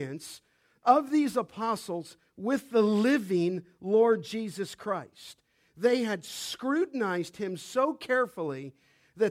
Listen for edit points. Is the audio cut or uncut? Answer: uncut